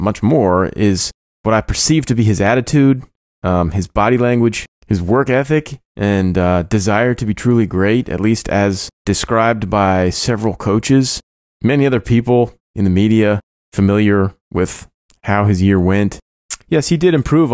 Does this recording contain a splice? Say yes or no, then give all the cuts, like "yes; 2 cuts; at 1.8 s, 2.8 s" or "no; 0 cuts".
yes; 1 cut; at 16.6 s